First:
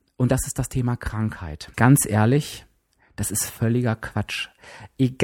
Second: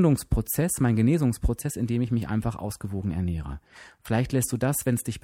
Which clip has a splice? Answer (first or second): first